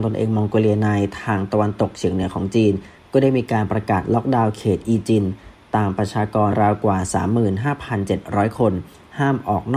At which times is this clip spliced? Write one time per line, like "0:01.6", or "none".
0:06.5